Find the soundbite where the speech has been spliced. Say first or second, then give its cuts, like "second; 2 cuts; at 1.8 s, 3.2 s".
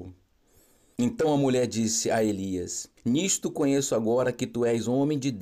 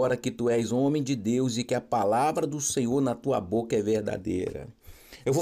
first; 2 cuts; at 1.0 s, 3.0 s